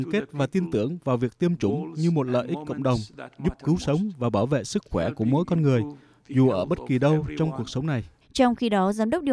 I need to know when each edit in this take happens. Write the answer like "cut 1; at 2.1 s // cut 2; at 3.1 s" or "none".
cut 1; at 8.2 s